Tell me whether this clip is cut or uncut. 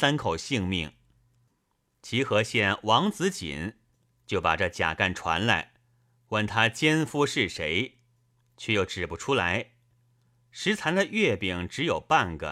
uncut